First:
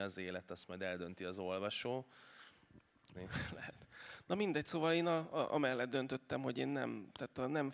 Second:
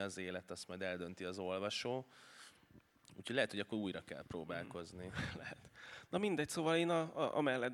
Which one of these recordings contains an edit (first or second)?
first